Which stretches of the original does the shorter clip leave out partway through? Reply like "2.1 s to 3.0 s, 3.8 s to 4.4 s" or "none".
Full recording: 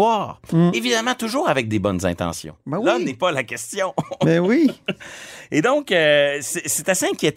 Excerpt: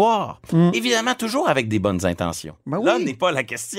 none